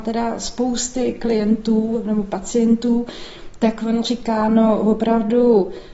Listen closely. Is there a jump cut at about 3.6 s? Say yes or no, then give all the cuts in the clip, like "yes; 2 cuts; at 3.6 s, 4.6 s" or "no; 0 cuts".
no; 0 cuts